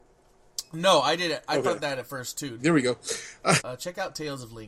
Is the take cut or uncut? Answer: cut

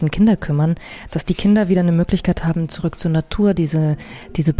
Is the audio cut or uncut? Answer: cut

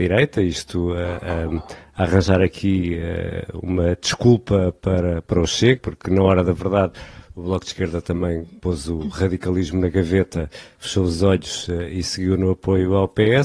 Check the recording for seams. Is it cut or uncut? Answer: cut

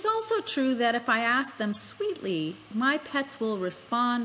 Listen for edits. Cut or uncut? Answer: cut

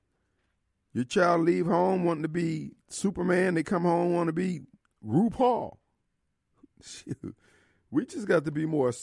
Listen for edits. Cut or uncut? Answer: uncut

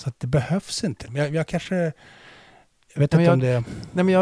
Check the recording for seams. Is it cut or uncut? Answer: cut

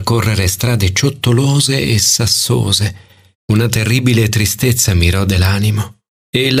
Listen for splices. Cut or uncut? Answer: cut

